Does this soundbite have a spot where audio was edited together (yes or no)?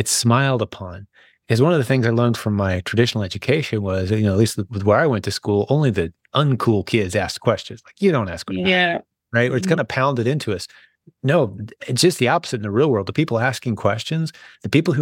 yes